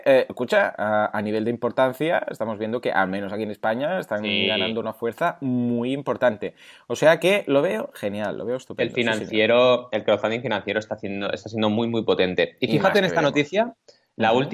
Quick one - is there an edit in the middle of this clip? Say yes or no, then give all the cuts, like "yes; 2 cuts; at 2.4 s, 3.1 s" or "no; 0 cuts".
no; 0 cuts